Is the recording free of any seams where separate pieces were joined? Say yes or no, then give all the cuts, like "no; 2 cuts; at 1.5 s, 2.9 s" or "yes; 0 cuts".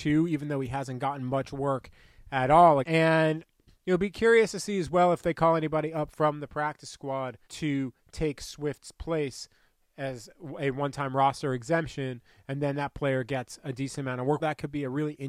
no; 3 cuts; at 2.8 s, 7.4 s, 14.4 s